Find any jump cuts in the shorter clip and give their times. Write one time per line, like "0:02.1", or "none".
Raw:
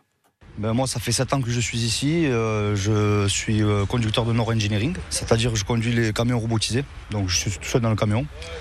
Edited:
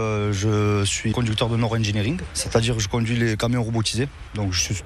0:01.1